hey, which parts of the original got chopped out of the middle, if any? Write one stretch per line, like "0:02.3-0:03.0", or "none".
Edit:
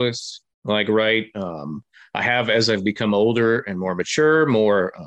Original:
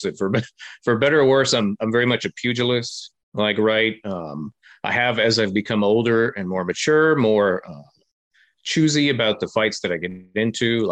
none